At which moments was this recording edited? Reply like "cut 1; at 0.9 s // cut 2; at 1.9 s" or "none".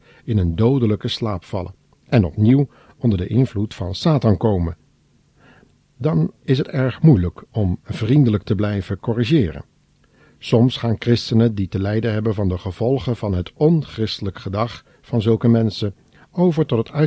none